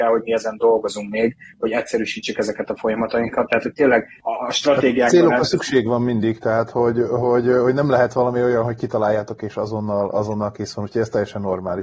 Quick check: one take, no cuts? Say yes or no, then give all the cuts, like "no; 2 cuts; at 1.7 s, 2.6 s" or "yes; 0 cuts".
yes; 0 cuts